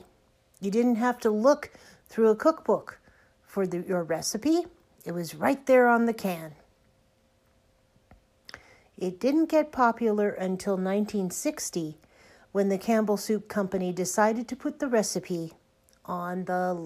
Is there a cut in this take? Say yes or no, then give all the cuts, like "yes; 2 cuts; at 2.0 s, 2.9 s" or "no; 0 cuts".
yes; 1 cut; at 8.8 s